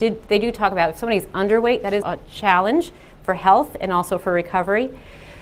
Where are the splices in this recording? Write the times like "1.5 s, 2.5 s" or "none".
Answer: 2.0 s